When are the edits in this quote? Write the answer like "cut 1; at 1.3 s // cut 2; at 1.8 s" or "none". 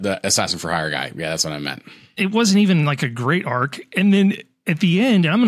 none